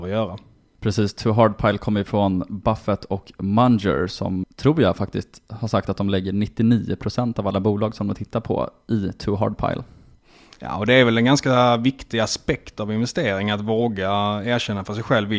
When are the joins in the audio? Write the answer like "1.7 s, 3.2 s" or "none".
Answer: 4.4 s